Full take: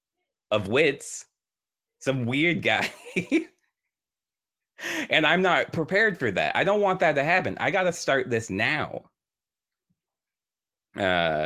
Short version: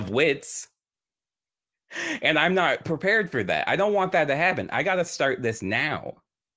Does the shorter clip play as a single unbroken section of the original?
no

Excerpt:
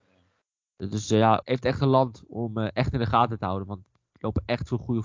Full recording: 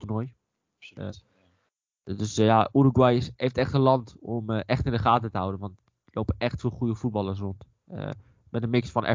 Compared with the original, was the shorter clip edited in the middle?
yes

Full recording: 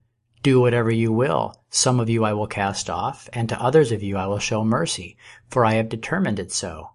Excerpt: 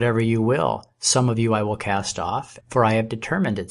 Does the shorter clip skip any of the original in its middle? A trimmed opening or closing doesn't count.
yes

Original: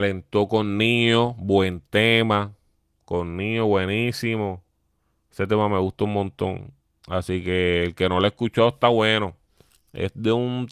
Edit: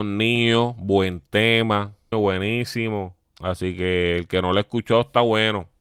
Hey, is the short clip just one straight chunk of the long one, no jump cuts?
no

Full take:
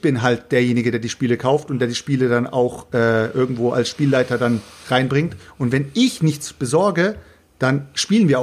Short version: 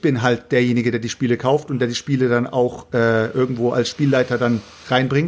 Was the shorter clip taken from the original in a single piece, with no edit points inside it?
yes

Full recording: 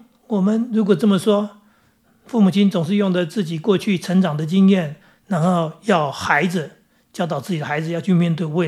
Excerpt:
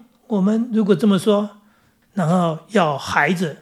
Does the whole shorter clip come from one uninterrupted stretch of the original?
no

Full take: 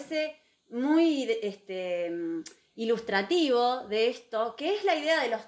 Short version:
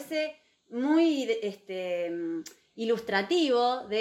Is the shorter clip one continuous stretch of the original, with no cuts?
yes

